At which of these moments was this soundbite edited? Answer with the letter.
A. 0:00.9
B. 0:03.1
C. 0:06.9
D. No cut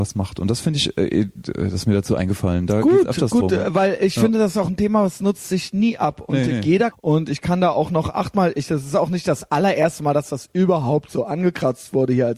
C